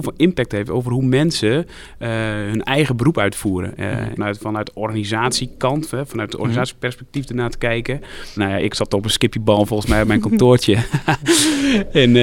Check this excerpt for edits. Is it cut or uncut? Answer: cut